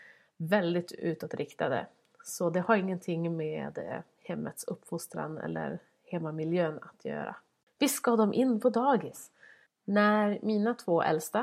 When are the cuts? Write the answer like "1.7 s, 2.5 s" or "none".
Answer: 7.7 s, 9.7 s